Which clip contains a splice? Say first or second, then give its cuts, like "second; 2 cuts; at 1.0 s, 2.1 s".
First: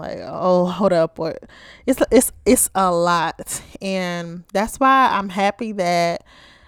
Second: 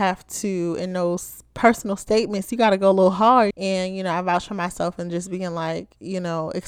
second; 1 cut; at 3.5 s